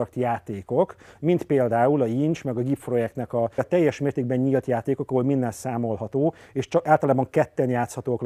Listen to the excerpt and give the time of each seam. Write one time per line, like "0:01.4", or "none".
0:03.6